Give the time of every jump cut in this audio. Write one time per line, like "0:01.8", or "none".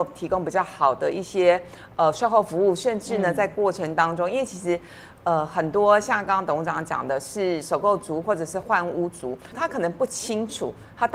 0:06.3
0:09.5